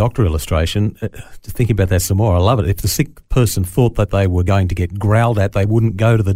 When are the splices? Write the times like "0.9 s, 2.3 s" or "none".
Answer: none